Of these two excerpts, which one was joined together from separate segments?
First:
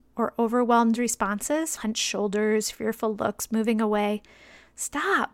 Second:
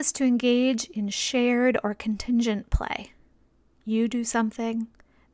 first; 1 cut; at 1.8 s

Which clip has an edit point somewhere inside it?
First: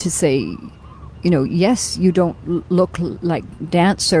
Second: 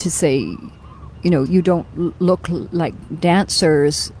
second; 1 cut; at 1.5 s

